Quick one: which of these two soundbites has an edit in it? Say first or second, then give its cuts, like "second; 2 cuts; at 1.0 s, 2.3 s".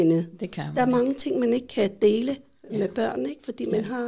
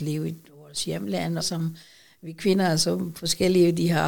second; 1 cut; at 1.4 s